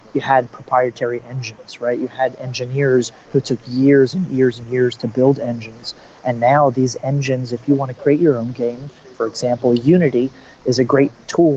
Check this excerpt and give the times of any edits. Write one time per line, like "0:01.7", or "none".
none